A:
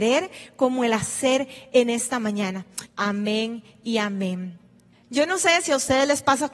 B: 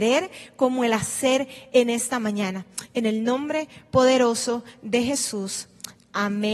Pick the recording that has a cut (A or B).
A